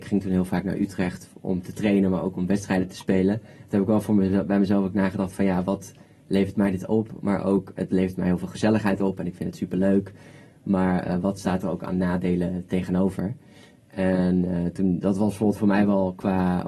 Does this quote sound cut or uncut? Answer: uncut